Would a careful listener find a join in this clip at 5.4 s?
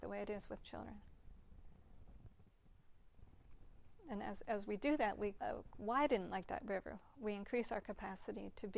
yes; 1 cut; at 5.4 s

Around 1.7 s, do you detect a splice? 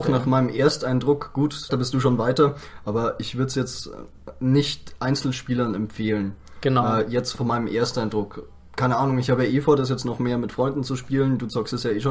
yes; 1 cut; at 1.7 s

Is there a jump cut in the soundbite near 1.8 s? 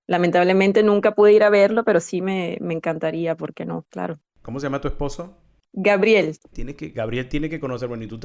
no; 2 cuts; at 4.4 s, 6.5 s

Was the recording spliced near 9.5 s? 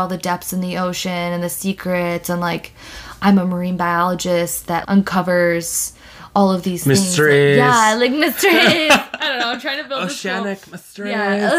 no; 1 cut; at 4.8 s

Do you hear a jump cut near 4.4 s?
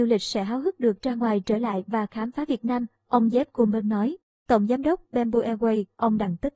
no; 1 cut; at 2.9 s

